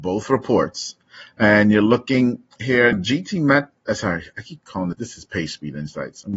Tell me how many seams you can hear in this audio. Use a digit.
2